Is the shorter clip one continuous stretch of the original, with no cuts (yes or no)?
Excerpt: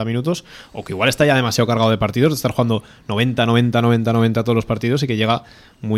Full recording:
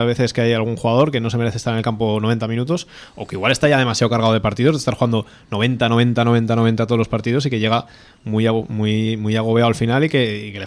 yes